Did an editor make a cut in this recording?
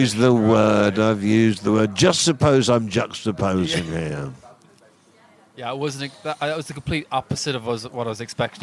no; 0 cuts

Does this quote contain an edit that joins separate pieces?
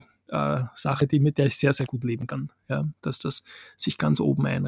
no; 0 cuts

